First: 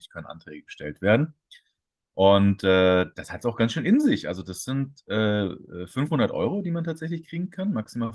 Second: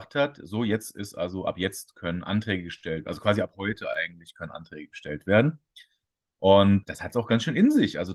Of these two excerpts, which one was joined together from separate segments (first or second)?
second